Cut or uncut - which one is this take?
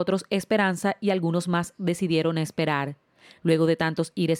uncut